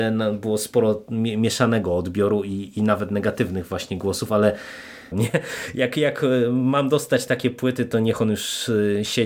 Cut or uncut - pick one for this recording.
cut